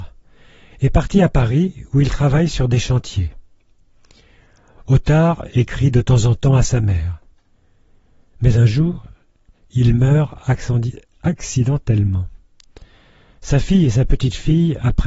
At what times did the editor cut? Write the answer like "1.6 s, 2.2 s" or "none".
none